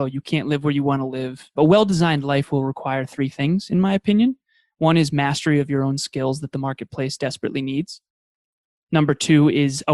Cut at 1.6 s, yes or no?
yes